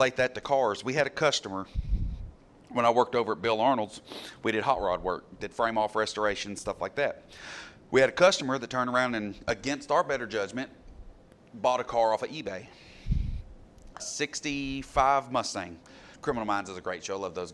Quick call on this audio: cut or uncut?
cut